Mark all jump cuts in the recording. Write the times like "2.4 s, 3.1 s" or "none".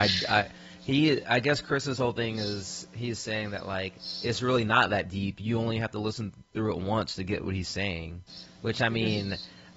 none